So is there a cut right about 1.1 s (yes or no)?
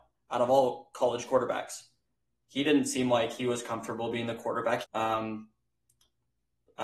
no